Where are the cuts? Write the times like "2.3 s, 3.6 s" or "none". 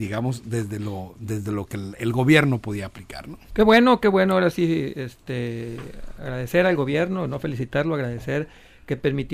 3.5 s